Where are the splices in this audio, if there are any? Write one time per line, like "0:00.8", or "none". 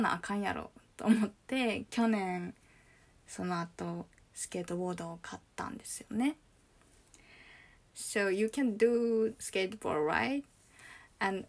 0:07.9